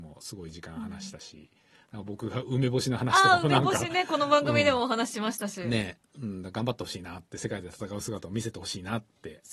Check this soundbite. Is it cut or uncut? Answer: uncut